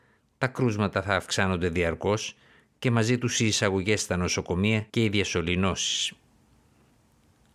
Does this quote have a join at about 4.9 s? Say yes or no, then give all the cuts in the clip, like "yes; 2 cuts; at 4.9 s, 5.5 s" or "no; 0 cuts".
yes; 1 cut; at 4.9 s